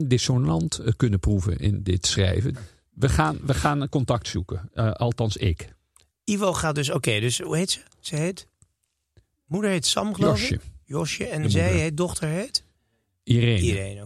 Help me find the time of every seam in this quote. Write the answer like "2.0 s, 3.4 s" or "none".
2.5 s